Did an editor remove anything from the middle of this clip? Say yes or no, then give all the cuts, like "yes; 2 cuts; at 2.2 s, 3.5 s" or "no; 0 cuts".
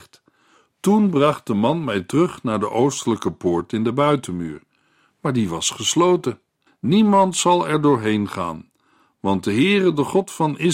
yes; 1 cut; at 6.7 s